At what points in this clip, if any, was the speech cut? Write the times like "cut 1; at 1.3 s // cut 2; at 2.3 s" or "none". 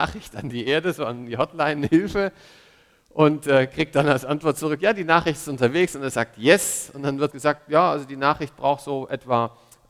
cut 1; at 7.3 s